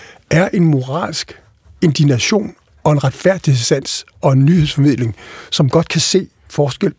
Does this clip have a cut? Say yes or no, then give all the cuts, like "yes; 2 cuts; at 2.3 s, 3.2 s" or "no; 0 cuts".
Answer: no; 0 cuts